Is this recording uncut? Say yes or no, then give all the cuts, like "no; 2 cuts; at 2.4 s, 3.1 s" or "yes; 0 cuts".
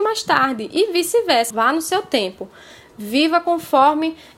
no; 1 cut; at 1.5 s